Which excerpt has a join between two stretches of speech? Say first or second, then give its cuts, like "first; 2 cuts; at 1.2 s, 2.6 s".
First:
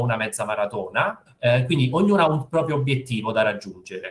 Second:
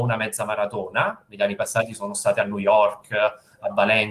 first; 1 cut; at 1.3 s